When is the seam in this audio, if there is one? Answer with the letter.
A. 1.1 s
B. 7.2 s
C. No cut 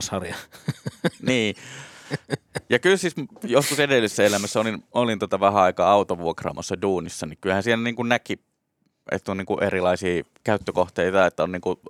C